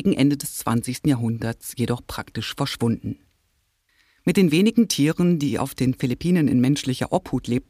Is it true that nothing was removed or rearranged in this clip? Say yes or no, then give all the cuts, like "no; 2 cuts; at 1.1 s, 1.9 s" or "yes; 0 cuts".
yes; 0 cuts